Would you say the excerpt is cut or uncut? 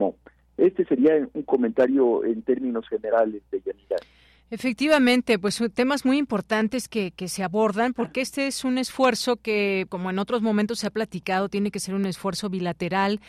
cut